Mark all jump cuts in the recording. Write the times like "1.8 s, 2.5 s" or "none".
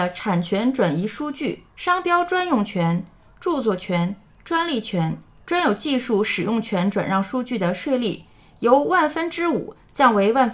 1.7 s

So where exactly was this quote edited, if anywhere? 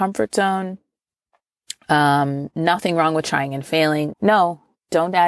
4.1 s

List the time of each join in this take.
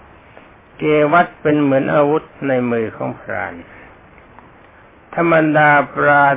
2.3 s

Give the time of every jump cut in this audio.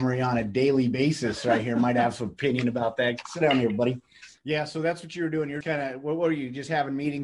4.4 s, 5.6 s

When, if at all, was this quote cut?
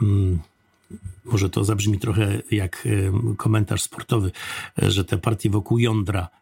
none

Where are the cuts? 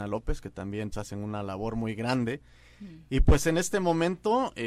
0.9 s

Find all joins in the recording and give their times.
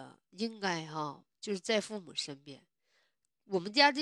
none

